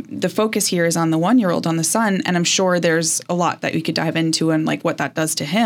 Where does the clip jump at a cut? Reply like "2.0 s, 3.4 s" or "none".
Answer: none